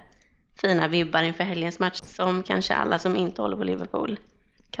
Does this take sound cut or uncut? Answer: cut